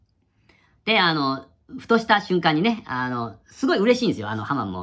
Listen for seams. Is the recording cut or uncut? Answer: uncut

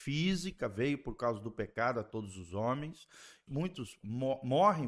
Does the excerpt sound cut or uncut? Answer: cut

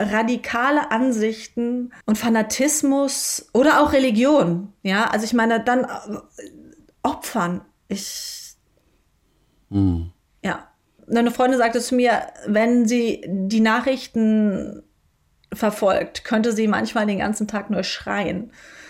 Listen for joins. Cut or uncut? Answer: cut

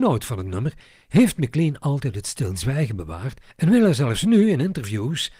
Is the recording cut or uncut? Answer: cut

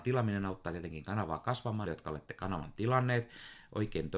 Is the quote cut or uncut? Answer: cut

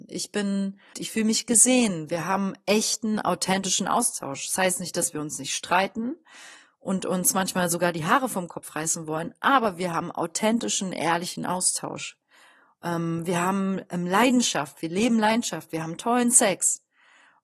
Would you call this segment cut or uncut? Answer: cut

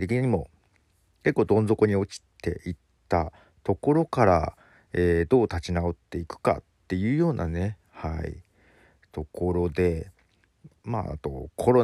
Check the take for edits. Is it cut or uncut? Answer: uncut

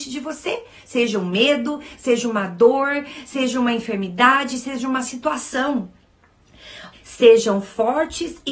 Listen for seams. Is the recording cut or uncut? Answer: cut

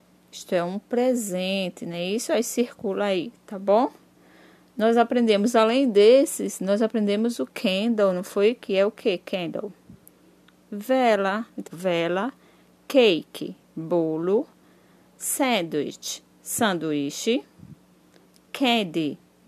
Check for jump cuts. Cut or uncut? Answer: cut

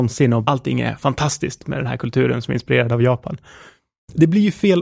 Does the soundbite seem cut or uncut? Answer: uncut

